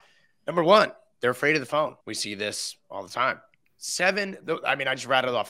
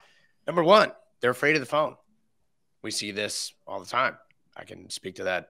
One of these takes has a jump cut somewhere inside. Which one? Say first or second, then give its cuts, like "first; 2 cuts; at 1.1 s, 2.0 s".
first; 2 cuts; at 2.0 s, 3.6 s